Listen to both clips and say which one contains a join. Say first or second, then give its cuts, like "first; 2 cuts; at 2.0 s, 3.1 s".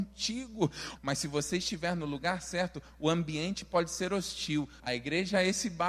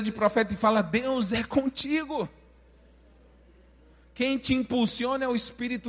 first; 2 cuts; at 1.0 s, 4.8 s